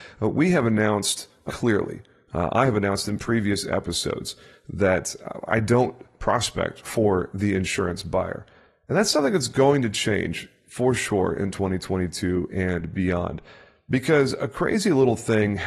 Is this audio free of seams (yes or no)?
no